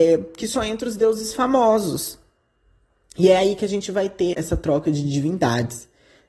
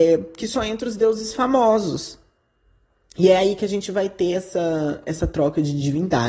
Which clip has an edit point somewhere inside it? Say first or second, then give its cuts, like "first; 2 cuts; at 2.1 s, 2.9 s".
first; 1 cut; at 4.3 s